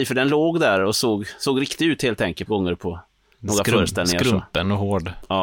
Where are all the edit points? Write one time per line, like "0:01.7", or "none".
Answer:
0:02.5